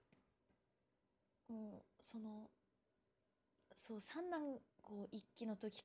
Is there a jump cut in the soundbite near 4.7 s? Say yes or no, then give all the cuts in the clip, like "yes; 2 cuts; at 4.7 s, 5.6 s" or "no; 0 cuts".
yes; 1 cut; at 4.7 s